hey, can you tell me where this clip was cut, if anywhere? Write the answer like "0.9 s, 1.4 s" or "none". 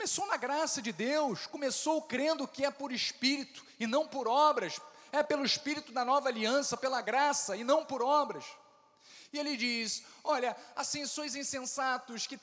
none